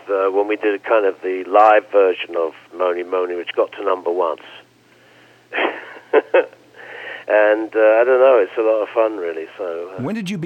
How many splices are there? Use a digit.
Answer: 1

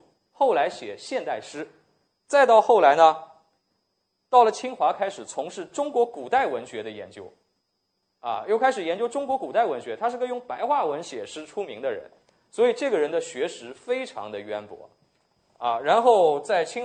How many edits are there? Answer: 0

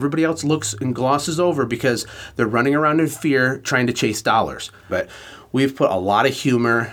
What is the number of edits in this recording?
1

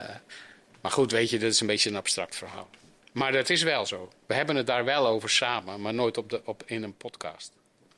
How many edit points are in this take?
0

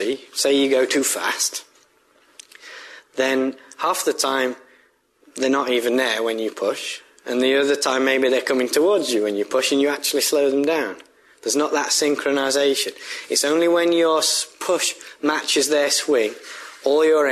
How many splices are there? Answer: 0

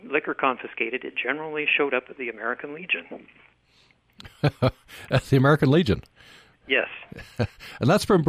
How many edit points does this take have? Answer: 0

